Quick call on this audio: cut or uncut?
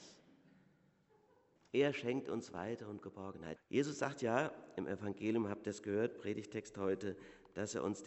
cut